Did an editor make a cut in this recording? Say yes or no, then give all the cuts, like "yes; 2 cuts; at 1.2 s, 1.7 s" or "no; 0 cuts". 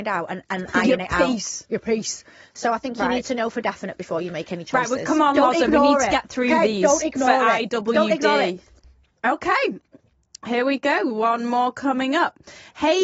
no; 0 cuts